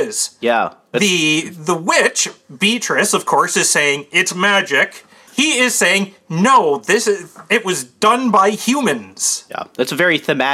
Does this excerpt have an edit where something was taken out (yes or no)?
yes